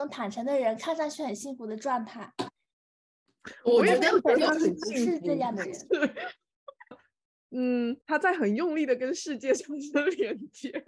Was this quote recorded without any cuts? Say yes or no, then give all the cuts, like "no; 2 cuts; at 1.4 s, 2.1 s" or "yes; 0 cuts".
no; 2 cuts; at 6.9 s, 8.0 s